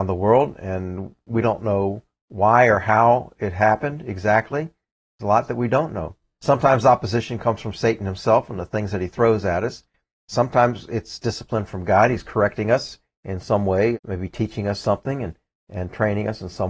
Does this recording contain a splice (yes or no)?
yes